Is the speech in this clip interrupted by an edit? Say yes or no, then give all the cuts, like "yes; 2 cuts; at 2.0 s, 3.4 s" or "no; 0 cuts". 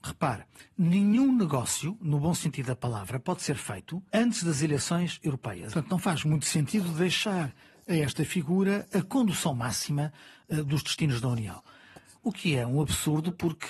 yes; 3 cuts; at 4.1 s, 5.7 s, 12.1 s